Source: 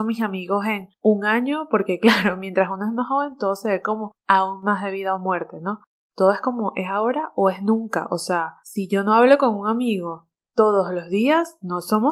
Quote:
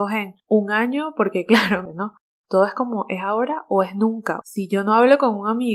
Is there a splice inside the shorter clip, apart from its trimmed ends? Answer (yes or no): yes